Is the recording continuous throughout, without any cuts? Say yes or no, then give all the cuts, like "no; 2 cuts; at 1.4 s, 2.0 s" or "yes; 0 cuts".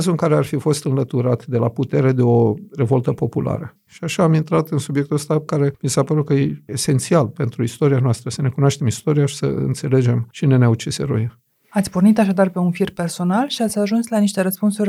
yes; 0 cuts